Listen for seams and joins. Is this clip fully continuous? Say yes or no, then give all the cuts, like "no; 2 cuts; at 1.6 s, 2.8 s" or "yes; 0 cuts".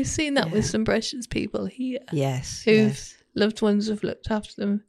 yes; 0 cuts